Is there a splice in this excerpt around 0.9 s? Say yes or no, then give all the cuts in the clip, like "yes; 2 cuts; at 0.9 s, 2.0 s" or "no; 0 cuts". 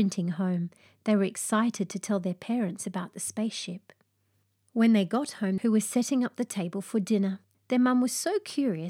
no; 2 cuts; at 5.6 s, 7.5 s